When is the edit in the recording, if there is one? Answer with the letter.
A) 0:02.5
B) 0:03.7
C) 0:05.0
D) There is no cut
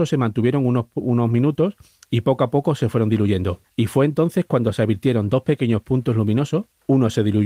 D